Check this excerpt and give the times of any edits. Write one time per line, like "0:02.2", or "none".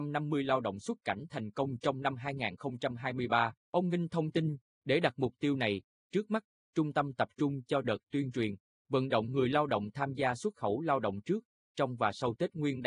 0:03.6